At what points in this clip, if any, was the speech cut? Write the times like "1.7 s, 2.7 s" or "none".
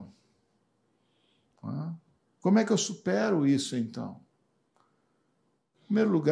none